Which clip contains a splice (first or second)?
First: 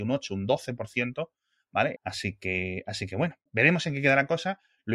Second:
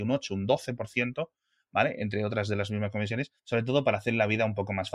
first